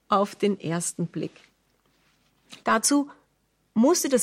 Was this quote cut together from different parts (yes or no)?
yes